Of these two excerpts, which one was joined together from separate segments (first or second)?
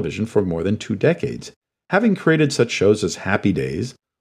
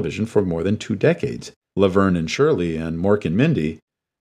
second